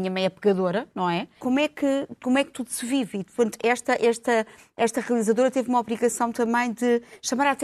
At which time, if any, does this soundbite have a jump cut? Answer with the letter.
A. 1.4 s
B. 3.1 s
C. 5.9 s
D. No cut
A